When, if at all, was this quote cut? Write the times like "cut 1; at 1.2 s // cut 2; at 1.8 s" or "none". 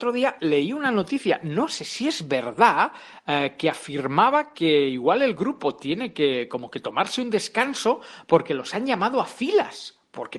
none